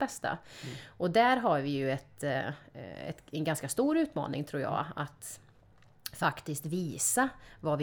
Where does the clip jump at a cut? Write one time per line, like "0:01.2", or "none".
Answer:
none